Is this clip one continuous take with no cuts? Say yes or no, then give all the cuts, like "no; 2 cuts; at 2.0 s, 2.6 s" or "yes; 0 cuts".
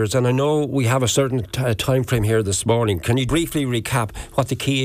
no; 1 cut; at 3.3 s